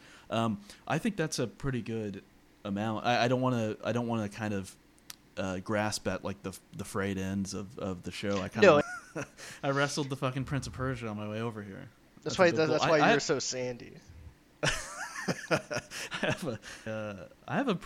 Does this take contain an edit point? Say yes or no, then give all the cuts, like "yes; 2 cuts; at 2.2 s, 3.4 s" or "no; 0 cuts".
yes; 3 cuts; at 8.8 s, 12.1 s, 16.9 s